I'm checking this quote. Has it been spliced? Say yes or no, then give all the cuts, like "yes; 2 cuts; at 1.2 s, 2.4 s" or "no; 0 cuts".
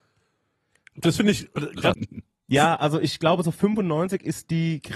yes; 1 cut; at 1.9 s